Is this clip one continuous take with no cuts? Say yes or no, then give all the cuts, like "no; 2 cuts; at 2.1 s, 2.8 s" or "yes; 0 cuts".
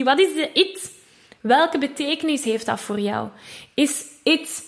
yes; 0 cuts